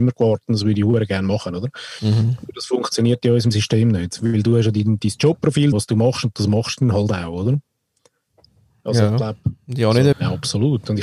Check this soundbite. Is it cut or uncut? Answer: cut